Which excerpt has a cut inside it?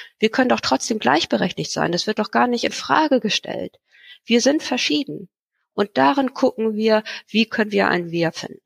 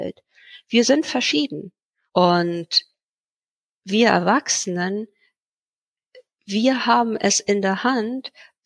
second; 1 cut; at 2.1 s

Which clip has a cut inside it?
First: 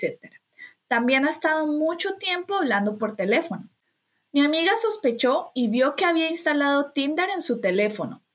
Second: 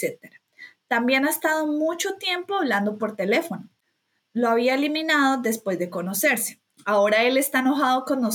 second; 2 cuts; at 4.2 s, 6.7 s

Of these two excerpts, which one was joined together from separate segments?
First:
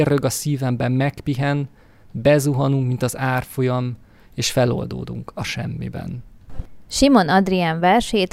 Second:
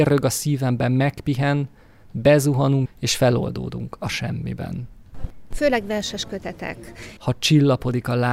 second; 3 cuts; at 2.8 s, 5.5 s, 7.2 s

